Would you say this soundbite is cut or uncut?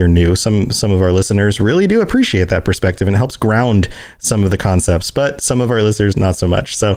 uncut